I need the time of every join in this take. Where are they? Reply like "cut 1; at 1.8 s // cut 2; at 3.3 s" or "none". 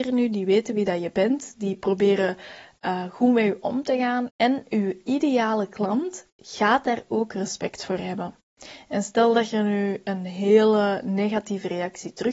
cut 1; at 4.3 s